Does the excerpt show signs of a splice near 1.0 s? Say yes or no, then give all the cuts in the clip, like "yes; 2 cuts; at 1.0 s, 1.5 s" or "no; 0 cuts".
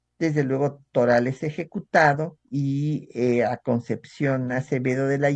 no; 1 cut; at 2.4 s